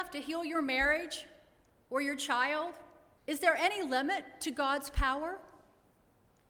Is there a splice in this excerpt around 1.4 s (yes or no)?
no